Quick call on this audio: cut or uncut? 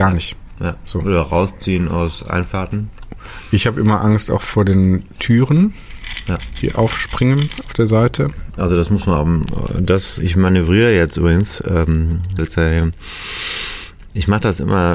cut